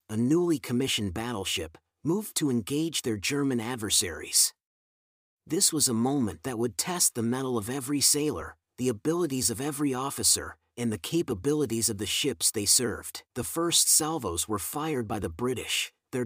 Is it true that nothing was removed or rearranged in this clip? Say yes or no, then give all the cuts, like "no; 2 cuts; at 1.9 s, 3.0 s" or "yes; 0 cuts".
no; 1 cut; at 13.3 s